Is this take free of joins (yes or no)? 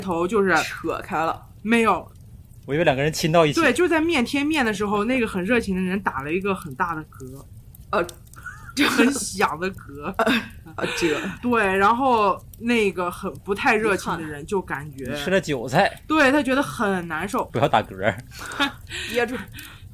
no